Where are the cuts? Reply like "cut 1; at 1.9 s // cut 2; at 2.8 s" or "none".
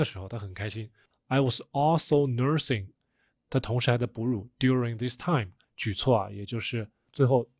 cut 1; at 1.1 s // cut 2; at 5.6 s